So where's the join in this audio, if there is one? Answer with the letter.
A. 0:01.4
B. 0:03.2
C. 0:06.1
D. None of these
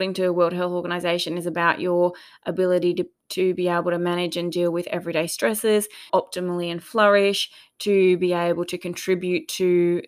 C